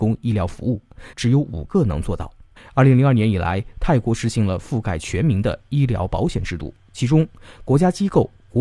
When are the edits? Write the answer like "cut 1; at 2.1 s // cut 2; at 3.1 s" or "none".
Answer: cut 1; at 1.1 s // cut 2; at 2.6 s